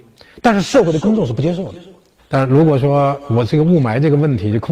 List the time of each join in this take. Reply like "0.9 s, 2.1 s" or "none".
2.2 s